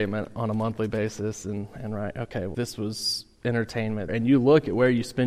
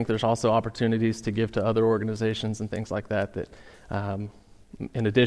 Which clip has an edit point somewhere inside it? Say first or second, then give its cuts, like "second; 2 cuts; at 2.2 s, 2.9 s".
first; 2 cuts; at 2.5 s, 4.1 s